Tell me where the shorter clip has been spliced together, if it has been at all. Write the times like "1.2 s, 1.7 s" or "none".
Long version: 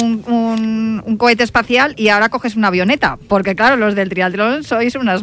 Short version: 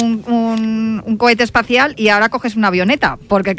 none